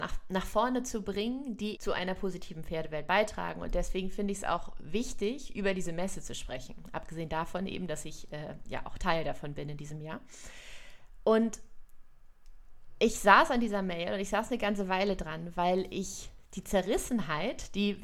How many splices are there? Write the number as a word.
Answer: one